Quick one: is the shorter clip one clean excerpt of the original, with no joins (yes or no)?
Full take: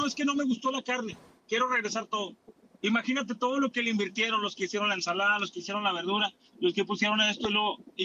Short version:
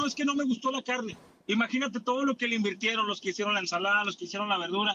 no